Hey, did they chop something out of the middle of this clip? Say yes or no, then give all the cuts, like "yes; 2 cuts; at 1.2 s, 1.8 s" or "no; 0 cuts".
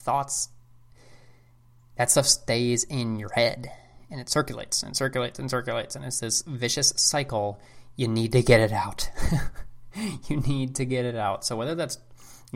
no; 0 cuts